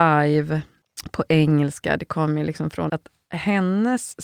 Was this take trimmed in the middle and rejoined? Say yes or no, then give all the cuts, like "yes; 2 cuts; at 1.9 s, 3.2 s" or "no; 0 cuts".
yes; 1 cut; at 2.9 s